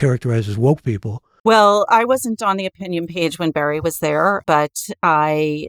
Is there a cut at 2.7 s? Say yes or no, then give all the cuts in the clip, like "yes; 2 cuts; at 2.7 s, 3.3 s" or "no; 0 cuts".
no; 2 cuts; at 1.4 s, 4.4 s